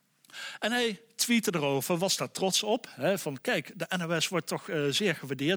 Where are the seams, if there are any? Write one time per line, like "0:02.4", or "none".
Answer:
none